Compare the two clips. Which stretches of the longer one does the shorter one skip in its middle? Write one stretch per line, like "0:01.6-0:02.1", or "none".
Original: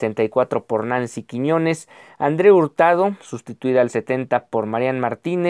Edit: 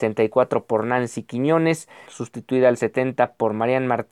0:02.1-0:03.2